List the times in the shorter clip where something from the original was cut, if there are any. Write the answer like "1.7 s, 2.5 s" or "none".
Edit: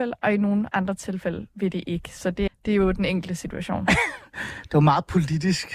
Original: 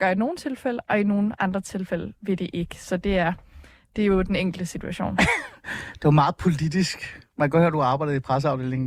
2.5 s